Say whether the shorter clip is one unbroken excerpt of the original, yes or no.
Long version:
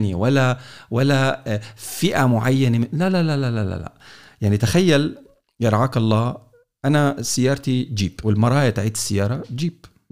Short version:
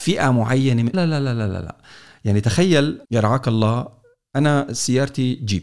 no